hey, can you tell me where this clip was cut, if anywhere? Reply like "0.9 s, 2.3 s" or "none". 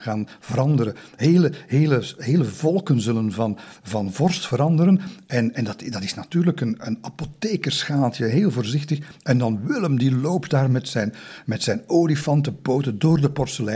none